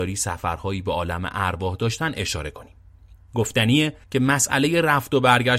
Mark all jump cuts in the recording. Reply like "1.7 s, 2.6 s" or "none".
4.0 s